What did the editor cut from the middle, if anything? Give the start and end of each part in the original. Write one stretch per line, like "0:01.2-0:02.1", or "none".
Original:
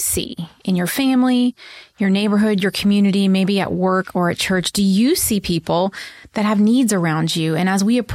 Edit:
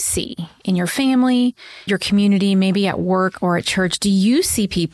0:01.9-0:02.6